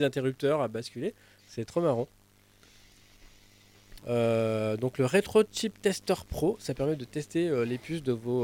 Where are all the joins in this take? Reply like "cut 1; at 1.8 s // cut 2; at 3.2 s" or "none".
cut 1; at 4.0 s